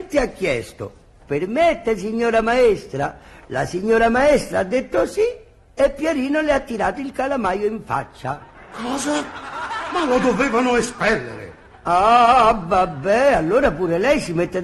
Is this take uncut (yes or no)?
yes